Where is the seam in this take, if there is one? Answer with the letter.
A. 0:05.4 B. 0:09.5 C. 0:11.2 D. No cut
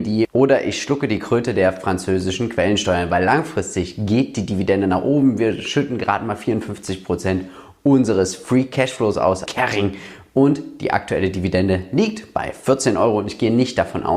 B